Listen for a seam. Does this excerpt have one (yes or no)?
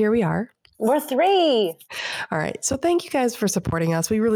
no